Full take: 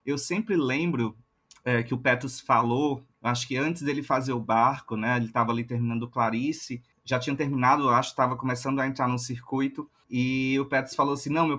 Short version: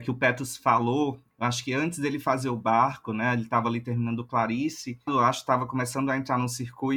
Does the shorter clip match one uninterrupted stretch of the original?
no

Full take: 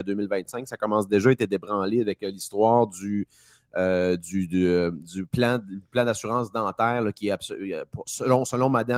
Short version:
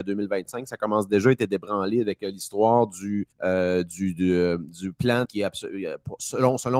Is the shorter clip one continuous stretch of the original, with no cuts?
no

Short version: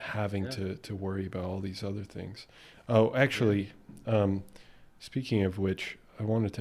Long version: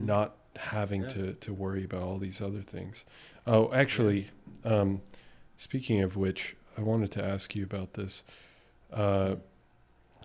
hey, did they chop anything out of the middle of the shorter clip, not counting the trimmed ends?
no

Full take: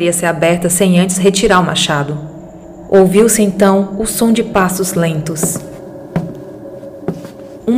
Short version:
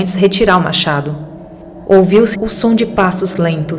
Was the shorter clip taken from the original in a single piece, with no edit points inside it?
no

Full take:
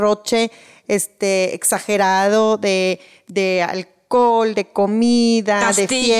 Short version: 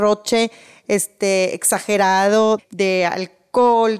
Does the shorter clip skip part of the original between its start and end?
yes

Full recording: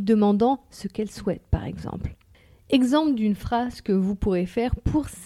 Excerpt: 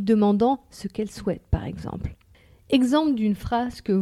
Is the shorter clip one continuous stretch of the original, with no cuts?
yes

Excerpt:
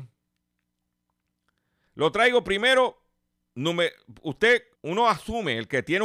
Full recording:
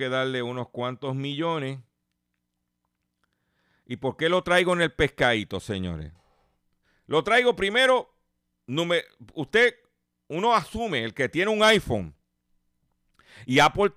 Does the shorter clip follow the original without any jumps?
no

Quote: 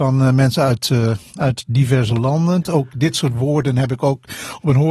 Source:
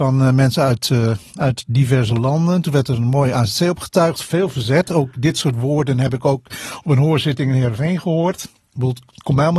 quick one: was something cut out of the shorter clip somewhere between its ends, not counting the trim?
yes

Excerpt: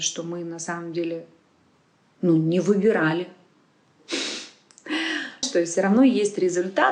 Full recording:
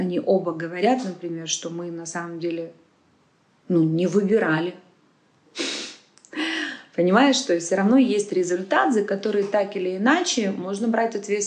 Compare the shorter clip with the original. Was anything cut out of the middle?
yes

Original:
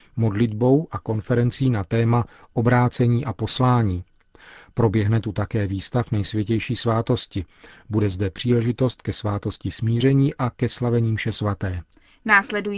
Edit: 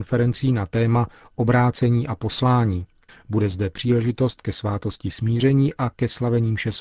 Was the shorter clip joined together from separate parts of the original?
yes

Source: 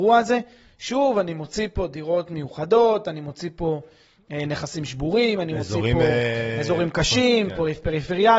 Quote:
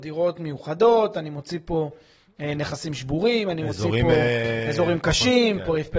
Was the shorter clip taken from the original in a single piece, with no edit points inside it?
yes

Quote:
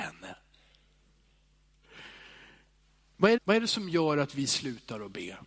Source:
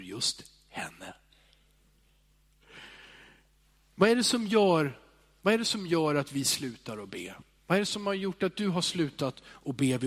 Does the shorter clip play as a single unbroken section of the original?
no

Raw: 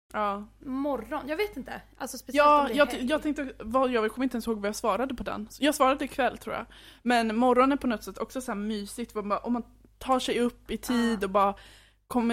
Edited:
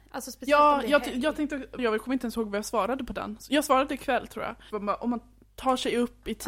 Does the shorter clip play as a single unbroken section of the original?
no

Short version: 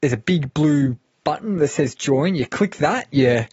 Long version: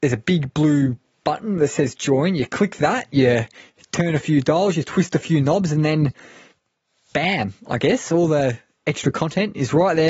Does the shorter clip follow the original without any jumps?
yes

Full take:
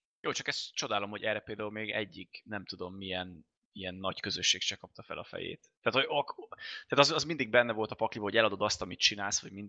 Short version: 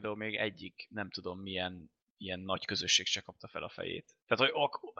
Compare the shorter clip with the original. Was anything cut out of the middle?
no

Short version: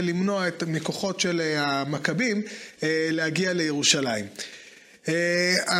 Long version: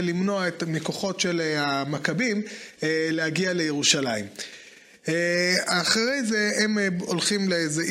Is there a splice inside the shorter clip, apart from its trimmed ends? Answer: no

